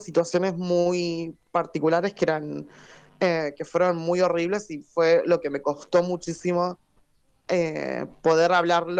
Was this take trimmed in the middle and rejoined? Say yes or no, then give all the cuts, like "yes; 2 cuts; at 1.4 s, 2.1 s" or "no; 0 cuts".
no; 0 cuts